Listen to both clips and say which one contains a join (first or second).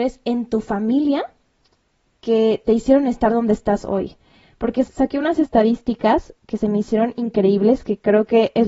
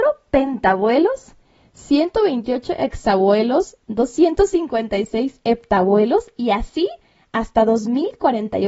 first